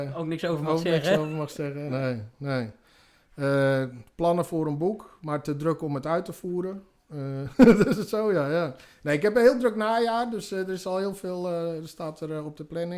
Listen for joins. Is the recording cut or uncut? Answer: uncut